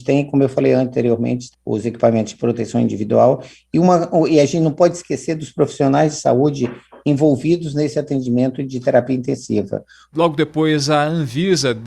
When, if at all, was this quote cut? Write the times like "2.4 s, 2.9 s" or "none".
1.5 s, 10.1 s

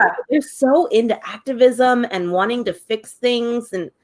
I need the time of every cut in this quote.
none

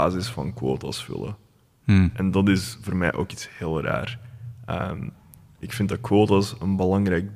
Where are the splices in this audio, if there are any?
none

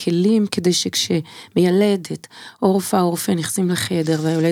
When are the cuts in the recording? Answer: none

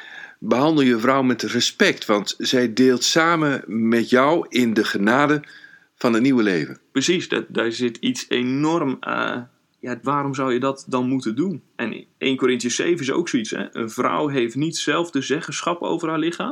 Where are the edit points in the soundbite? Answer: 10.0 s

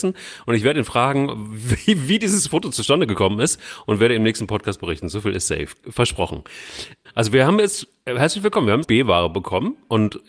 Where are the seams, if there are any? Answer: 7.0 s, 8.8 s

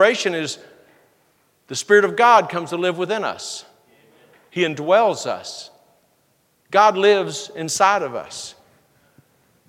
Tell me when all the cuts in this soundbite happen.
none

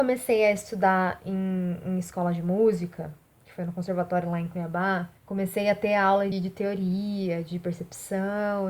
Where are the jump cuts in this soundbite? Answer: 5.2 s, 6.3 s

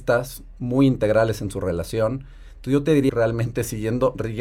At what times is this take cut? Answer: 3.1 s

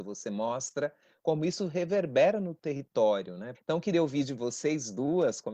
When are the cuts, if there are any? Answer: 3.5 s

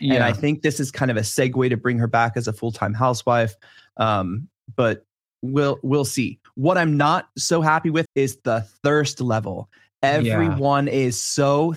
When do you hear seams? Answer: 8.1 s

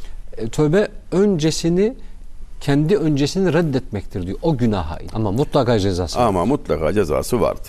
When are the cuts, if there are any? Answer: 5.1 s

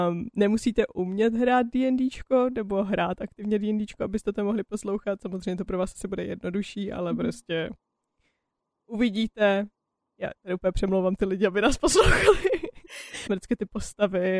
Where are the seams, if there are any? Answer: 13.3 s

